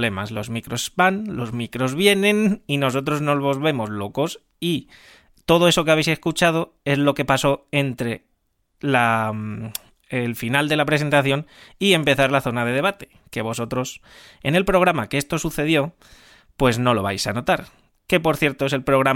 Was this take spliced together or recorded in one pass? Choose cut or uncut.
uncut